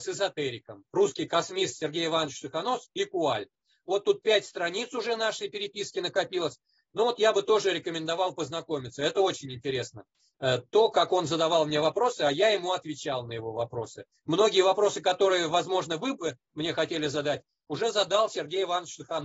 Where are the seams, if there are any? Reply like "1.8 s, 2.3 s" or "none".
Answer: none